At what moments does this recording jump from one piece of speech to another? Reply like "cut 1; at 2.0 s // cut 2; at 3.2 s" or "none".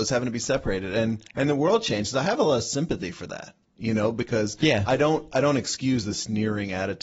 cut 1; at 1.3 s